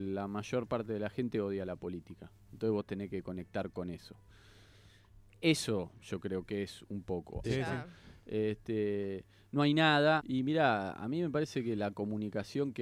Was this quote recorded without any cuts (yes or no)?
no